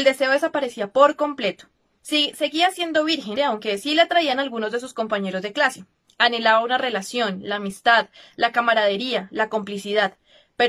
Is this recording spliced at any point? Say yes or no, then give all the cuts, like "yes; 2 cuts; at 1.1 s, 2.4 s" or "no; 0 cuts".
yes; 2 cuts; at 2.0 s, 3.4 s